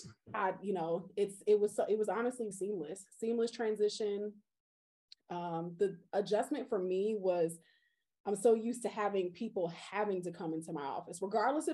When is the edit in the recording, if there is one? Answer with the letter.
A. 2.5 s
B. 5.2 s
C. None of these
A